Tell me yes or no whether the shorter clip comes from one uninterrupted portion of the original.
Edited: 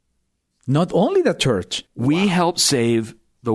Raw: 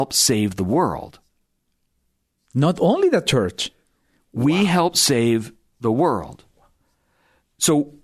no